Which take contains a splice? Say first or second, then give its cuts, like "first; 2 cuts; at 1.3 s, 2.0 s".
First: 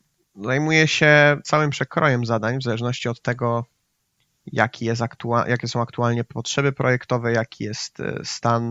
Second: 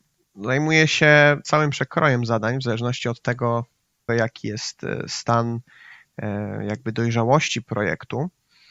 second; 1 cut; at 4.1 s